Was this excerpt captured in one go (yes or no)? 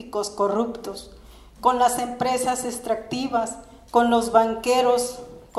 yes